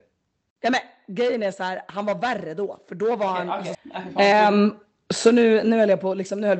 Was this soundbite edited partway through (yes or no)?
yes